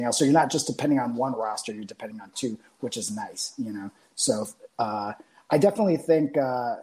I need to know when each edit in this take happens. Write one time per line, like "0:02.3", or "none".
none